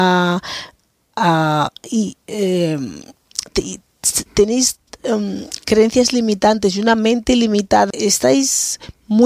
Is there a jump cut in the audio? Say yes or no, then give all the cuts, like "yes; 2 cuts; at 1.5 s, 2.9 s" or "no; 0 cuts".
yes; 1 cut; at 7.9 s